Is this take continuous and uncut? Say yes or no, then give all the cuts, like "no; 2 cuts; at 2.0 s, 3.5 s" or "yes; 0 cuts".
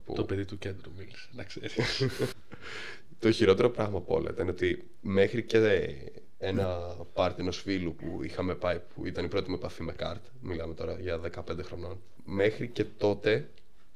no; 1 cut; at 2.3 s